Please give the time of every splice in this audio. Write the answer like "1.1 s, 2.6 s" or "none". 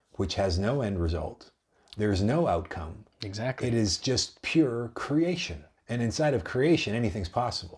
5.8 s

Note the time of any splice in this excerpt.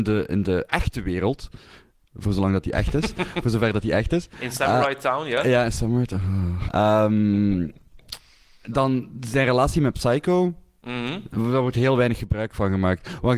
6.7 s

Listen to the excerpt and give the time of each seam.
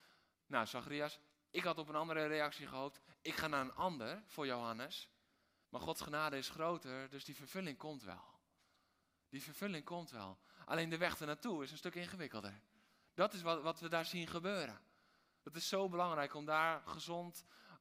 5.6 s, 15.4 s

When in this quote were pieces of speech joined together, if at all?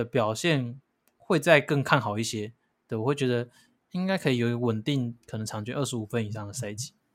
none

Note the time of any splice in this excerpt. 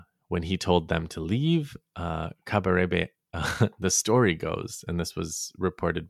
none

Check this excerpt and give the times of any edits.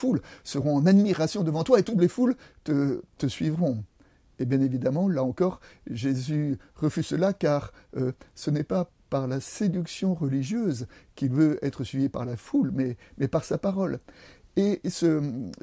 none

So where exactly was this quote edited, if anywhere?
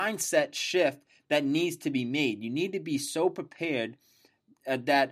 none

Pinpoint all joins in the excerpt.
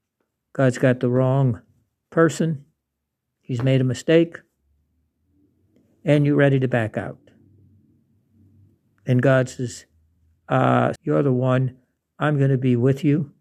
11.0 s

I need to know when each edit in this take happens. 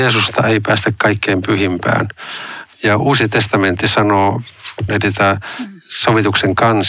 2.7 s, 4.9 s

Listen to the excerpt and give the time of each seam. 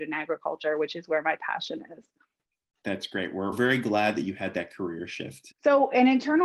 5.5 s

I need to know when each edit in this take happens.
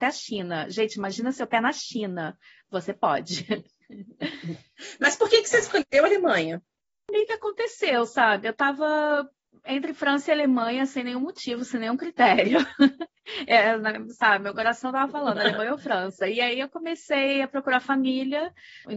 none

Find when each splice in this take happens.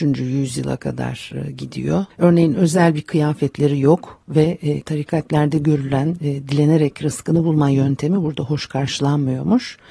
2.1 s, 4.8 s

